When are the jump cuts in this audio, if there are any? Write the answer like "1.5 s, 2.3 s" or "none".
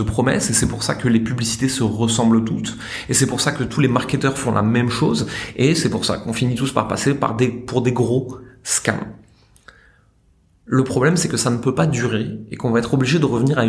none